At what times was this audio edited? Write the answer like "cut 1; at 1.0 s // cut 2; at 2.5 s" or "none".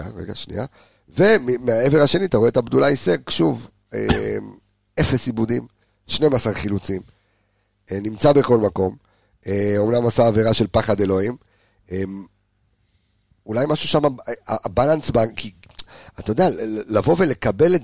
none